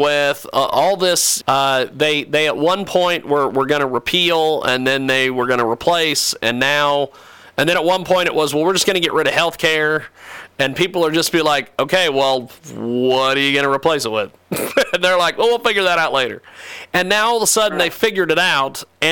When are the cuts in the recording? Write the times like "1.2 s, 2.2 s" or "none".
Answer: 1.4 s

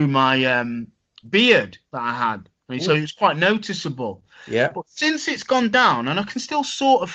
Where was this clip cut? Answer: none

